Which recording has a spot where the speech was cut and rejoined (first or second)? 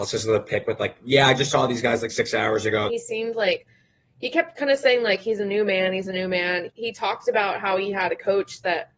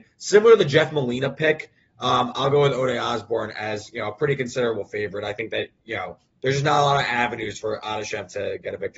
first